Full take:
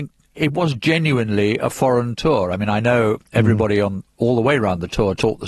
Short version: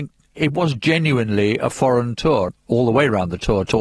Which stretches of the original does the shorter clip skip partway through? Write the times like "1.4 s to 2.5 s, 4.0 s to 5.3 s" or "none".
2.5 s to 4.0 s